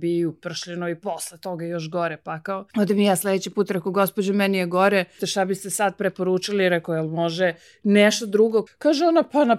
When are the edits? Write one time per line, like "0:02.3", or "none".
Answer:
0:02.7
0:05.2
0:08.7